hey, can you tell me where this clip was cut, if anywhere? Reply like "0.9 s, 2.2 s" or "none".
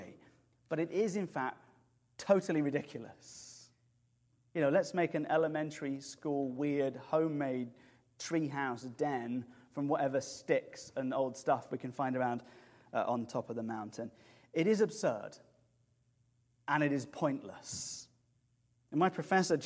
none